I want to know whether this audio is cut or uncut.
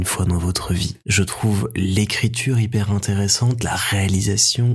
uncut